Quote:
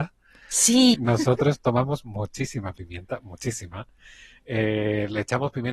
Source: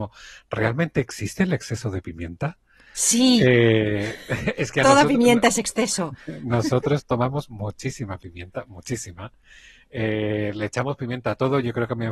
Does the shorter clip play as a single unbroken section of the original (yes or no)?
no